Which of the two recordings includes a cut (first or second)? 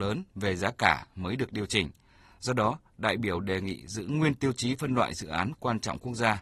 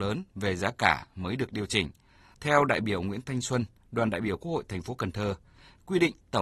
second